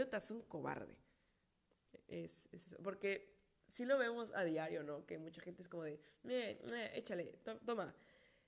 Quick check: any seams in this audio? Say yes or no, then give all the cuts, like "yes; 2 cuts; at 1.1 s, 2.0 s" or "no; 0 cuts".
no; 0 cuts